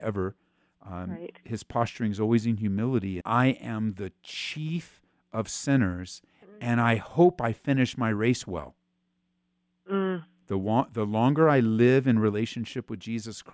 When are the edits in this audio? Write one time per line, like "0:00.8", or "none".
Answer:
0:03.2
0:10.4